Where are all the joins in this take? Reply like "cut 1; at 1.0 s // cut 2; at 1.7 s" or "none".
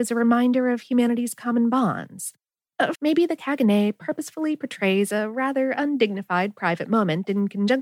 cut 1; at 2.9 s